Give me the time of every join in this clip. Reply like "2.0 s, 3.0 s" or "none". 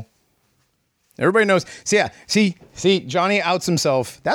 1.0 s